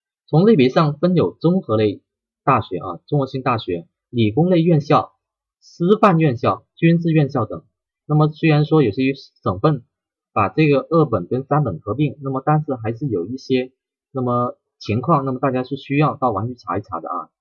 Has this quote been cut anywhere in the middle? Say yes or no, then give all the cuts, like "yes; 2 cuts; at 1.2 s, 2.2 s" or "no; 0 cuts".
yes; 1 cut; at 8.0 s